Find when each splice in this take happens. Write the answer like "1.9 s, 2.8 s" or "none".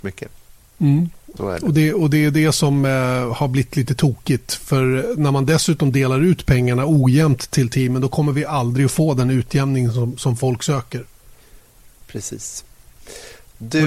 1.4 s